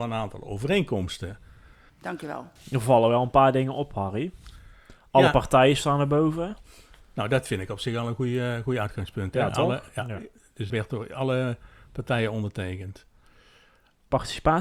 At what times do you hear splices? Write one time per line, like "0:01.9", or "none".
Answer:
0:01.9
0:10.7